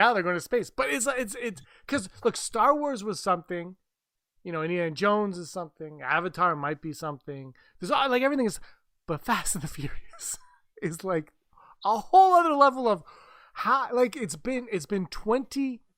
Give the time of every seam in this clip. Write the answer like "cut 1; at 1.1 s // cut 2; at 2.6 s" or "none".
none